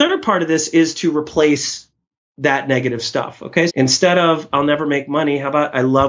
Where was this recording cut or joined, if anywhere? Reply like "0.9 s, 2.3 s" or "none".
3.7 s